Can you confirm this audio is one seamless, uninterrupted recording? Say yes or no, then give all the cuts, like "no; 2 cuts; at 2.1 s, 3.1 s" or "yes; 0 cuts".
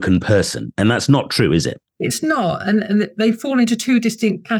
no; 1 cut; at 1.9 s